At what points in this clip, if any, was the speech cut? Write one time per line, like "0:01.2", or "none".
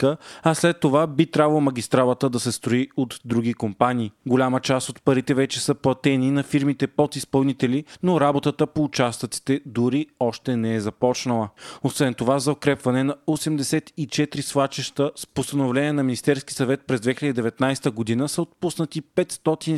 none